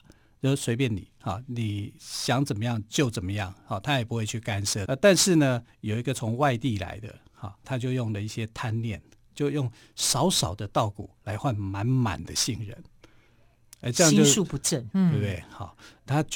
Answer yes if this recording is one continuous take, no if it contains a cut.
no